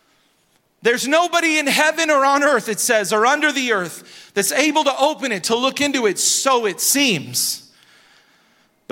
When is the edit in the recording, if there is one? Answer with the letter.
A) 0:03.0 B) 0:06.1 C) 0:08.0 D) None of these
D